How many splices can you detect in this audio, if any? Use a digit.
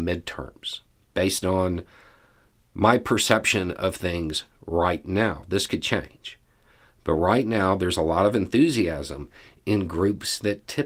0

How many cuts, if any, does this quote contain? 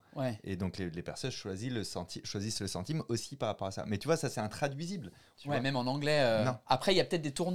1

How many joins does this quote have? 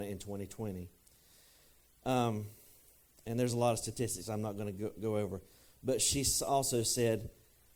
0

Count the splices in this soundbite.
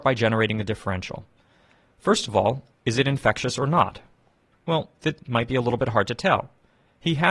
1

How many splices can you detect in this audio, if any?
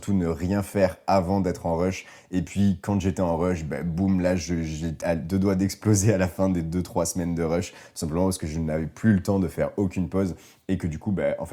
1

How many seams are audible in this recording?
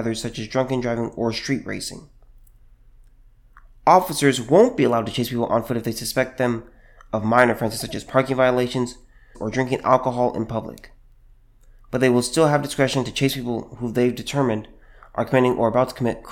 1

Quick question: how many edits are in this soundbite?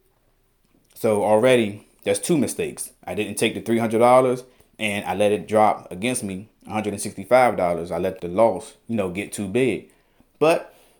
1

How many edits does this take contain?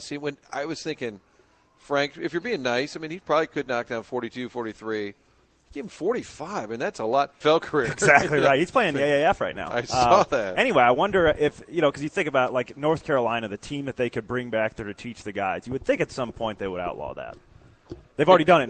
1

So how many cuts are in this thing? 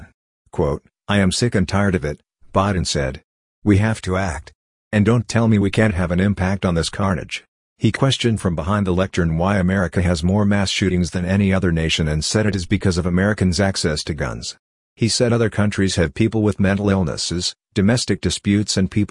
0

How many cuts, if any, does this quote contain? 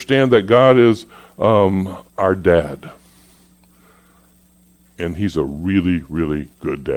1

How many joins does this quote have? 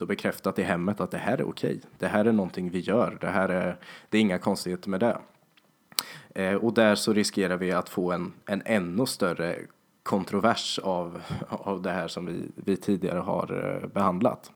0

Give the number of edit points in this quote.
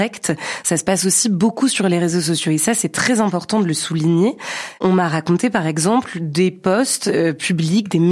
0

